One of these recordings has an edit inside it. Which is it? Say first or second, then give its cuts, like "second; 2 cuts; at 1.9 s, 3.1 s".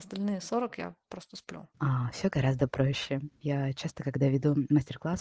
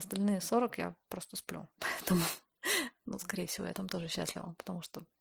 first; 2 cuts; at 1.7 s, 3.4 s